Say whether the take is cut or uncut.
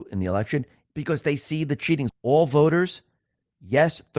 cut